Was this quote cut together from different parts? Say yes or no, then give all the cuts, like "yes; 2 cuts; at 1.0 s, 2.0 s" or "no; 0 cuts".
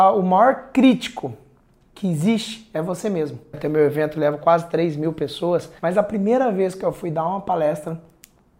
yes; 2 cuts; at 3.5 s, 5.8 s